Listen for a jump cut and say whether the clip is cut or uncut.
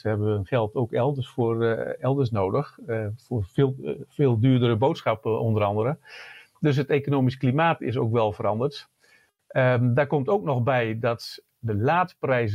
uncut